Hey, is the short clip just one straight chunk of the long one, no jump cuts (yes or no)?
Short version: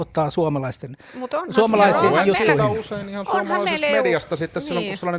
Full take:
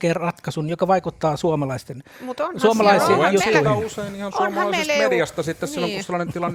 yes